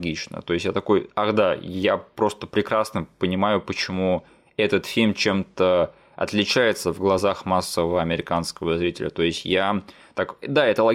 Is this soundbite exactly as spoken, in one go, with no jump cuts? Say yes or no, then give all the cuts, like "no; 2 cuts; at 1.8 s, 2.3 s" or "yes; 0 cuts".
yes; 0 cuts